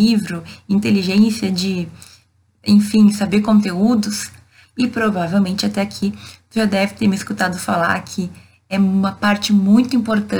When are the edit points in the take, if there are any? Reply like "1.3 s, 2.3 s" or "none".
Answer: 4.6 s